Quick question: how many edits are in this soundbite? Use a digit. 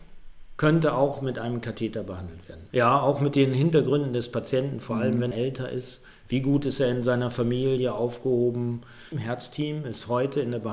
3